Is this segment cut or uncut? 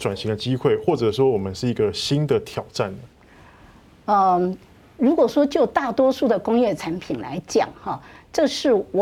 uncut